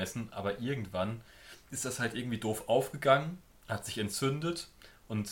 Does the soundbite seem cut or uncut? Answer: cut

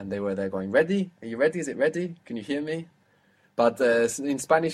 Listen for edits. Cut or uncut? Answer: uncut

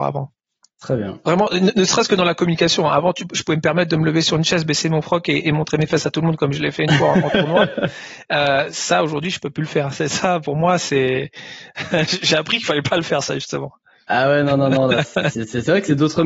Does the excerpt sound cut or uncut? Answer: cut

